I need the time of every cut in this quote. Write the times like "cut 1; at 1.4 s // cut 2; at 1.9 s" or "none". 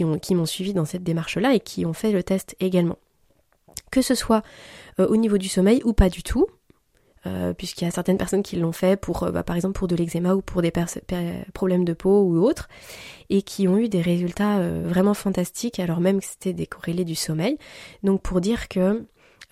none

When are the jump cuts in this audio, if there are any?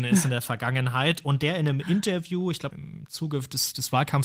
cut 1; at 2.7 s

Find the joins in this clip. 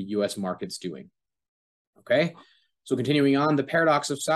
none

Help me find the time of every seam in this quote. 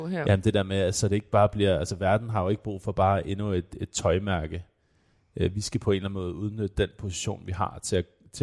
none

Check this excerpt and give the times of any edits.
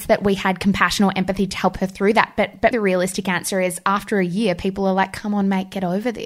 cut 1; at 2.7 s

